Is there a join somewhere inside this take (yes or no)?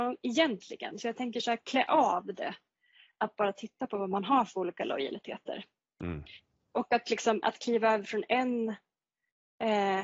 yes